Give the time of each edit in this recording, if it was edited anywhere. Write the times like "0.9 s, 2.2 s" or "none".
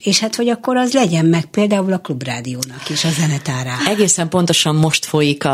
3.8 s